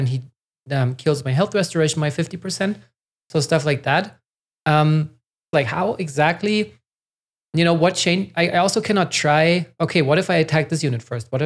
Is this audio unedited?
no; 1 cut; at 5.5 s

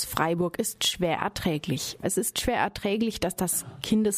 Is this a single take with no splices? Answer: no; 1 cut; at 2.0 s

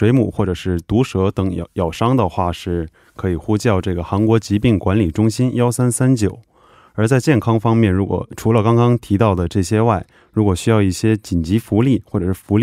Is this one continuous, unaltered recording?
yes; 0 cuts

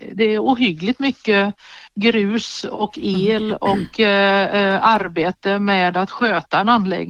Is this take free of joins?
yes; 0 cuts

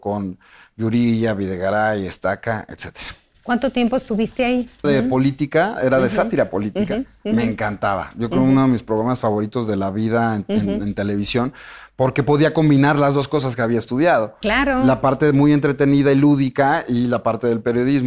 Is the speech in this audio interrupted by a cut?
yes; 1 cut; at 4.8 s

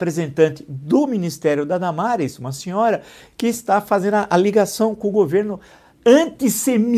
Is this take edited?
no; 0 cuts

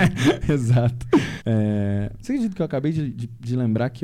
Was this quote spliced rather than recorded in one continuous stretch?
yes; 1 cut; at 1.4 s

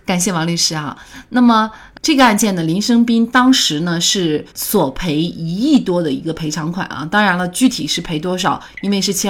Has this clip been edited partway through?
yes; 1 cut; at 4.5 s

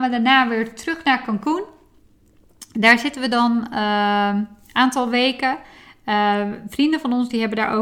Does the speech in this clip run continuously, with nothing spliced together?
yes; 0 cuts

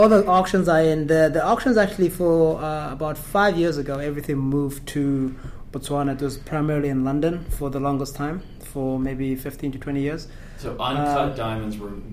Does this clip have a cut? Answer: no; 0 cuts

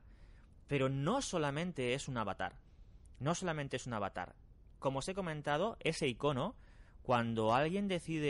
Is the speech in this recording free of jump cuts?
yes; 0 cuts

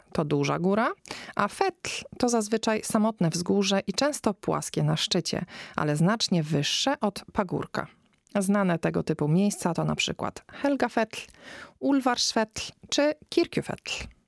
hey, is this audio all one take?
yes; 0 cuts

